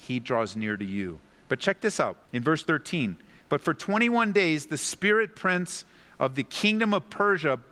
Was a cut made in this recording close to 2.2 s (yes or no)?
yes